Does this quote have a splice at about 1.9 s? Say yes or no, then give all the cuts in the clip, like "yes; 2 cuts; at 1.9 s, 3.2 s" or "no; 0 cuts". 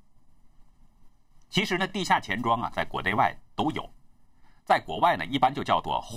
no; 0 cuts